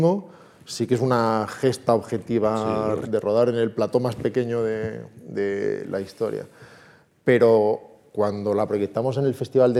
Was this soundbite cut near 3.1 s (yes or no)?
yes